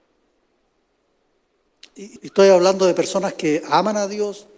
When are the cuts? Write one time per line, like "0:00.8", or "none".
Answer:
0:02.2